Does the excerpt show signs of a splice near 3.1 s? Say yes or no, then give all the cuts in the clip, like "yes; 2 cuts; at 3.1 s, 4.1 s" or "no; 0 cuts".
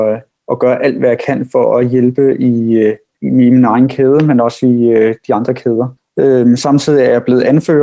yes; 1 cut; at 3.1 s